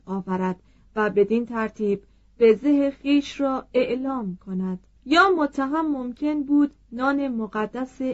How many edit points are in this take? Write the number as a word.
one